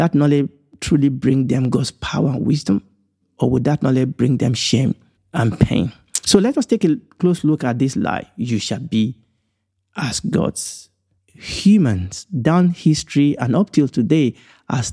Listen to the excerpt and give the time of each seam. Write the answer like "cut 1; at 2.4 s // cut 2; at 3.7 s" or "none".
cut 1; at 3.2 s // cut 2; at 5.2 s